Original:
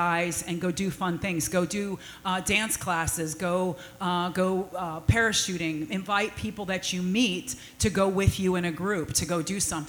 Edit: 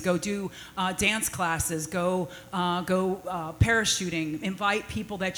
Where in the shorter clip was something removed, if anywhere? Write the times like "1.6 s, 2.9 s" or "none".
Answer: none